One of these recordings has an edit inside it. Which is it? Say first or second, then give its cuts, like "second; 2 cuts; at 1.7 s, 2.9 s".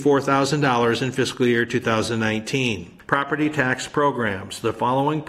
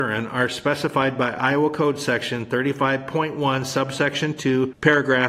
first; 1 cut; at 3.0 s